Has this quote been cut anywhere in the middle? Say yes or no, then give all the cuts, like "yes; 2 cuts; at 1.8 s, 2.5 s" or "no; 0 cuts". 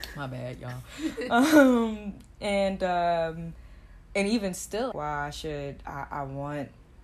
yes; 1 cut; at 4.9 s